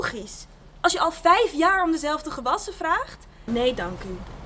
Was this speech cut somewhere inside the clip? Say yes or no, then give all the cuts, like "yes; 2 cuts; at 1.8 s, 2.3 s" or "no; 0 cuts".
yes; 1 cut; at 3.5 s